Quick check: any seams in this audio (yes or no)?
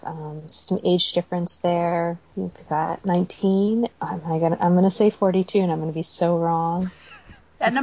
no